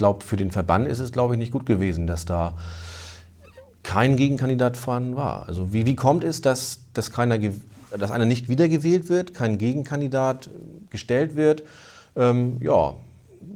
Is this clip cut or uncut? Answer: uncut